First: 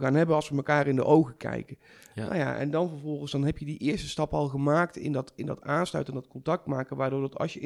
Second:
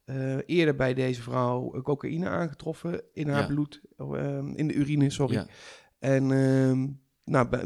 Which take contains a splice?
second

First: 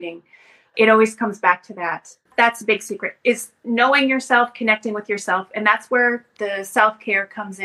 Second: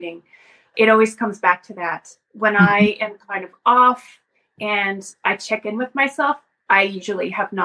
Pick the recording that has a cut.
first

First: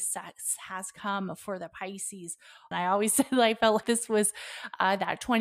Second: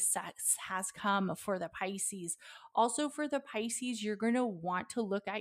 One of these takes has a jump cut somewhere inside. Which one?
first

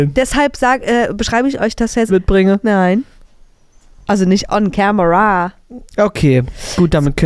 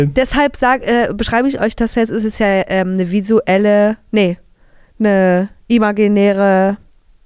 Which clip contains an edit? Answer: first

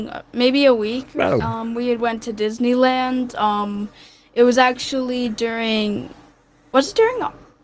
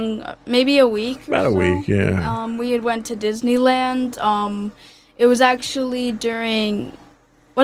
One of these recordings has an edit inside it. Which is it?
first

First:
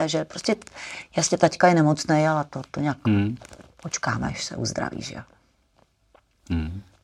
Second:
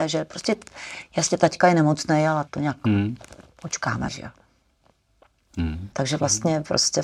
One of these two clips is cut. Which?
second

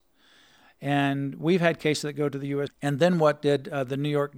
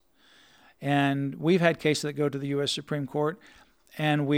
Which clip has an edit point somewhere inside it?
first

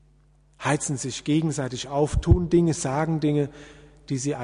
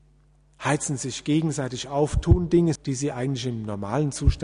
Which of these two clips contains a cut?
second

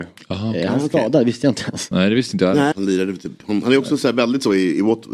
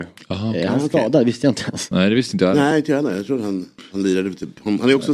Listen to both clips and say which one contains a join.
first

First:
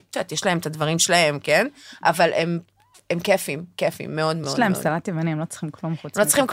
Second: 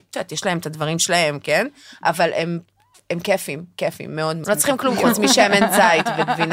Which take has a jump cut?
second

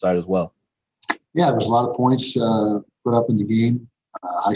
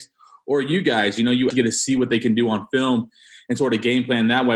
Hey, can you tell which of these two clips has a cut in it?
second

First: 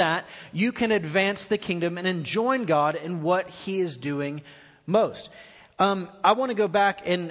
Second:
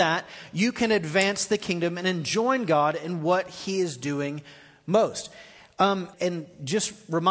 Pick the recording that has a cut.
second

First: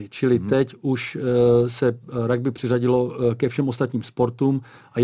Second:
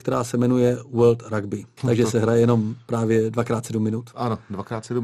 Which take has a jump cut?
second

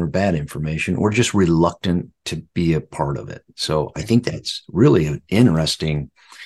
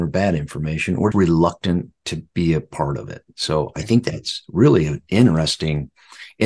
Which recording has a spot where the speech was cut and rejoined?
second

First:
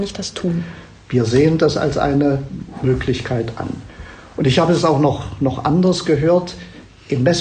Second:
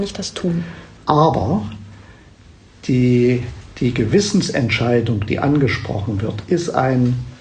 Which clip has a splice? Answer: second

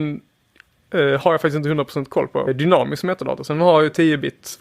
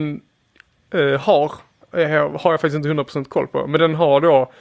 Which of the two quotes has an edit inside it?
first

